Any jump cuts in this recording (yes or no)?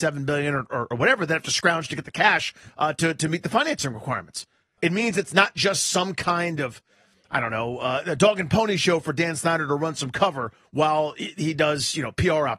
yes